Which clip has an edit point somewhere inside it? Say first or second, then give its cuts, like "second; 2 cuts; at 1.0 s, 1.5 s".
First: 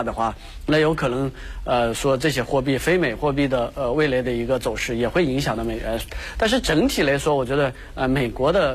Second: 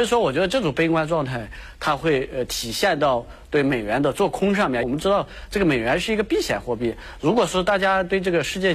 second; 1 cut; at 4.8 s